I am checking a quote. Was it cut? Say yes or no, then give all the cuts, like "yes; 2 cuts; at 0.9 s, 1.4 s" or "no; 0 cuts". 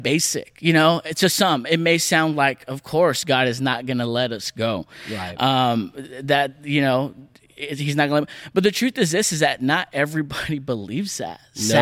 no; 0 cuts